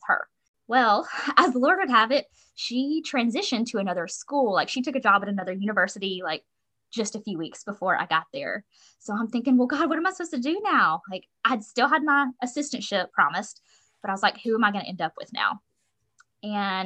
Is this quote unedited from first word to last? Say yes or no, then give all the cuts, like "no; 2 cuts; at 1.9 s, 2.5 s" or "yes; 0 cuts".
no; 1 cut; at 13.1 s